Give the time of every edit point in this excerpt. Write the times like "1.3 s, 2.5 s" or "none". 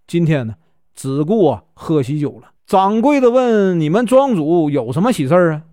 2.6 s